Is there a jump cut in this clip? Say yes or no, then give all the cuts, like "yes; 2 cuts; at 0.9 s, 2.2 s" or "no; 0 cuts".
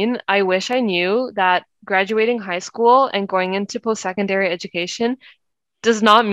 no; 0 cuts